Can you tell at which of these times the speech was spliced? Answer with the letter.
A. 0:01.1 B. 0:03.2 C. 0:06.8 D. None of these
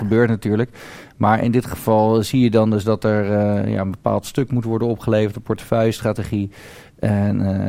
D